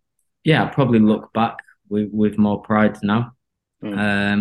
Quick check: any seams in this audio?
no; 0 cuts

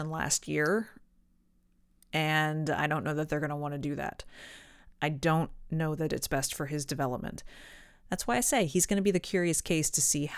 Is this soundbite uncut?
no; 1 cut; at 4.9 s

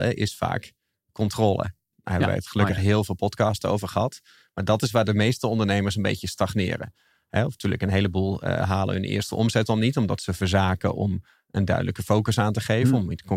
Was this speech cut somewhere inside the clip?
no; 0 cuts

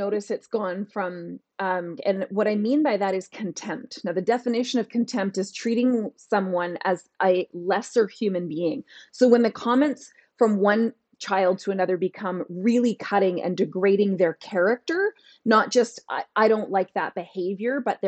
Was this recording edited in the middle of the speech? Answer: yes; 1 cut; at 2.0 s

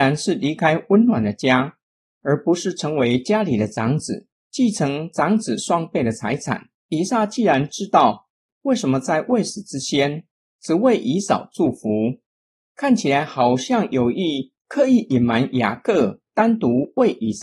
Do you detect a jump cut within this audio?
yes; 1 cut; at 6.7 s

